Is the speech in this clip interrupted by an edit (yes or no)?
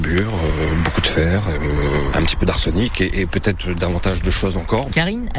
no